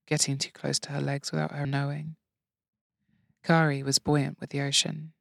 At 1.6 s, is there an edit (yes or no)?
yes